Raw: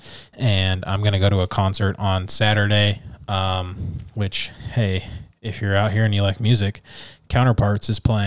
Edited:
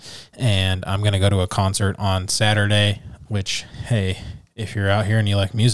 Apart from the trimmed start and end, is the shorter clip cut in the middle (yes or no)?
yes